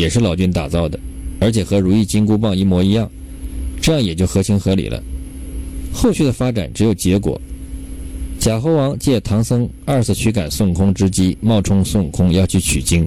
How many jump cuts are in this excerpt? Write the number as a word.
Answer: zero